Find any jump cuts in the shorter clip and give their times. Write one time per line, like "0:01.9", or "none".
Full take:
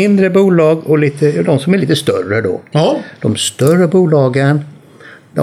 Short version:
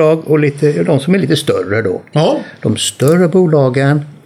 none